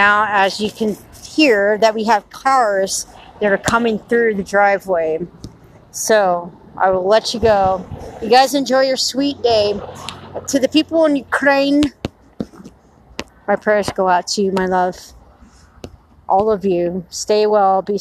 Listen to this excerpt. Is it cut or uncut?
uncut